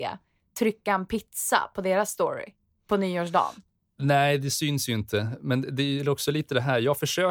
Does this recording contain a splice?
no; 0 cuts

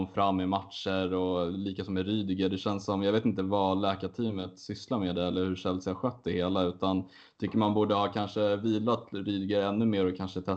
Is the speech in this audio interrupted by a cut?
no; 0 cuts

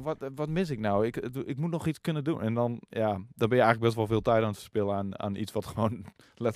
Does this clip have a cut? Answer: no; 0 cuts

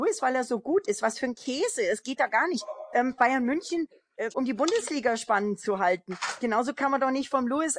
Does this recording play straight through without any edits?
no; 1 cut; at 4.3 s

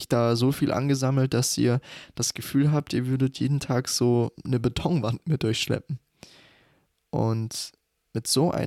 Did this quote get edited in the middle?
no; 0 cuts

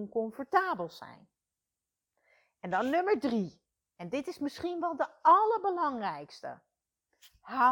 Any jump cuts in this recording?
no; 0 cuts

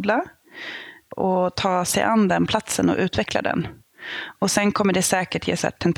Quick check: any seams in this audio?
no; 0 cuts

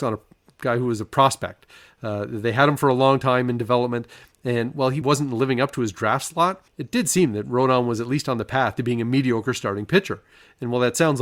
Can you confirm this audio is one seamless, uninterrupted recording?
no; 2 cuts; at 5.0 s, 6.7 s

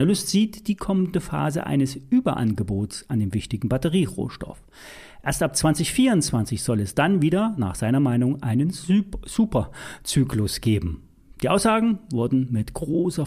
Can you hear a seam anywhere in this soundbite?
no; 0 cuts

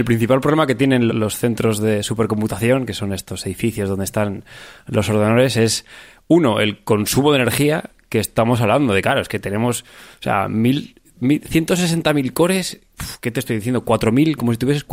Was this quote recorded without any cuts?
no; 1 cut; at 1.1 s

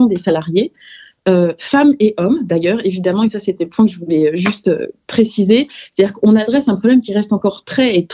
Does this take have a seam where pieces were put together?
no; 0 cuts

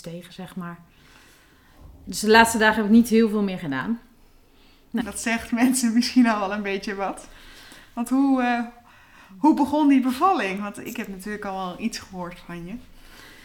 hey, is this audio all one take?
no; 1 cut; at 5.0 s

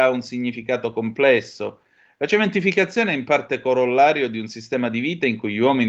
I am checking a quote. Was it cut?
no; 0 cuts

